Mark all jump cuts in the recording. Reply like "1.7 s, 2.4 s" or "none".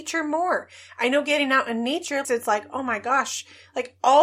2.2 s